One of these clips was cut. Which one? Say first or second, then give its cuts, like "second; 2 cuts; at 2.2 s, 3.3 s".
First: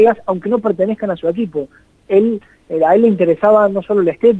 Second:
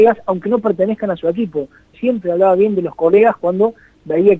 second; 1 cut; at 1.9 s